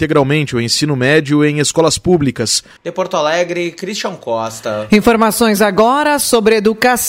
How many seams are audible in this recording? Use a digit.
1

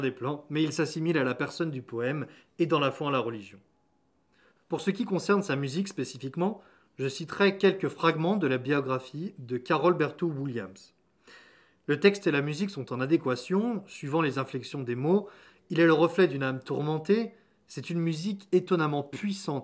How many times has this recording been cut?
1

